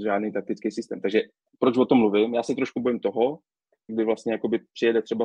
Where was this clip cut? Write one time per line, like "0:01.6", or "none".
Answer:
0:03.9